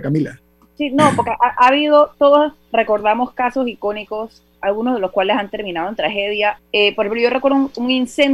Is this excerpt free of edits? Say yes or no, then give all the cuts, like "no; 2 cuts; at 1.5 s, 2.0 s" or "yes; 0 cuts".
no; 2 cuts; at 4.5 s, 6.6 s